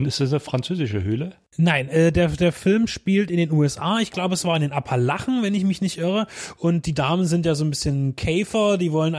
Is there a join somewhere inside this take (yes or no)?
no